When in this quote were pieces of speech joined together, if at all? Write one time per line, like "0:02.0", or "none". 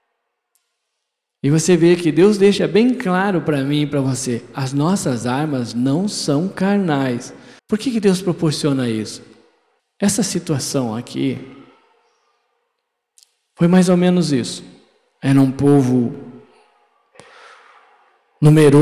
0:07.6
0:09.8